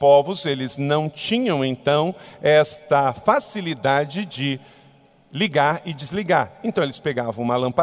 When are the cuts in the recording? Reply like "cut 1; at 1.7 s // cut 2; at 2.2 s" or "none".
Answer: none